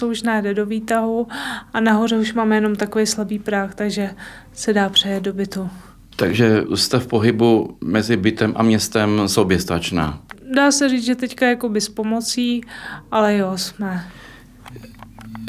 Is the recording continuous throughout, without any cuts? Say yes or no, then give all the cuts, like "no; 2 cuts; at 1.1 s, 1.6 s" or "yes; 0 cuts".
yes; 0 cuts